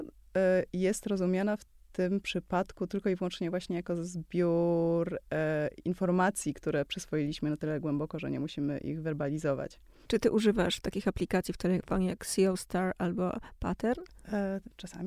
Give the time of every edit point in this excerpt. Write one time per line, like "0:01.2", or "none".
0:10.1